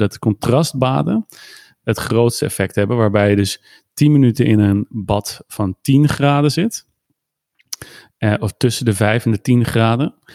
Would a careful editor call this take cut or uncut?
uncut